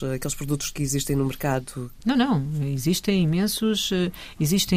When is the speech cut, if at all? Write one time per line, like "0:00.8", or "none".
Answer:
0:02.0